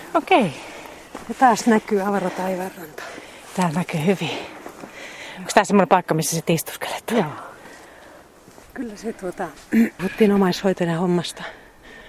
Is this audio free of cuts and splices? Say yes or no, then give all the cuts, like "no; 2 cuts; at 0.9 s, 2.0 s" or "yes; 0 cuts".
yes; 0 cuts